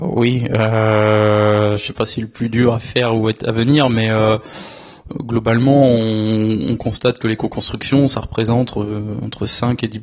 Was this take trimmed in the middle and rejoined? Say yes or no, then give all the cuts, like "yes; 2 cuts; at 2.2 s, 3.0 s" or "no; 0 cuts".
no; 0 cuts